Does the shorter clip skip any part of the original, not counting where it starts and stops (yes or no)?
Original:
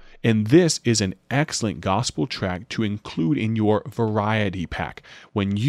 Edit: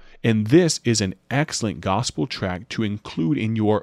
no